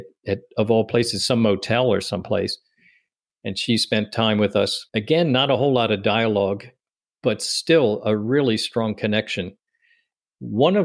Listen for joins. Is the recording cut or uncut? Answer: cut